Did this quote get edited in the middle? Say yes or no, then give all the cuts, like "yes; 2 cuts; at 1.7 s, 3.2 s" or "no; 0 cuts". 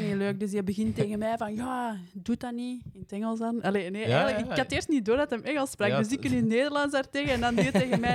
no; 0 cuts